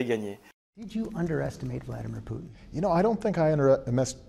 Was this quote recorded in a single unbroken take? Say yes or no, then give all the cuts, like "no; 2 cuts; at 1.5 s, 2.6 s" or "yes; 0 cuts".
yes; 0 cuts